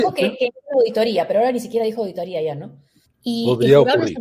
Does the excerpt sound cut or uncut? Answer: cut